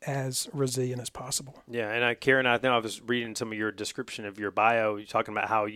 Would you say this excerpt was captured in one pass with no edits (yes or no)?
yes